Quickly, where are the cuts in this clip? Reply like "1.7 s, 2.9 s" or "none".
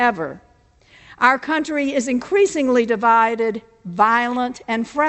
none